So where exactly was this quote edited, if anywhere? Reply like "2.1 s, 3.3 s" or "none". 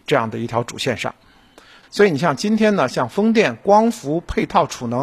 1.8 s